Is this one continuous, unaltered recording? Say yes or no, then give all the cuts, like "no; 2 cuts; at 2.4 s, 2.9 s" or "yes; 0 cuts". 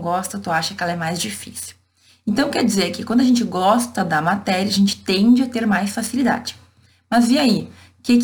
yes; 0 cuts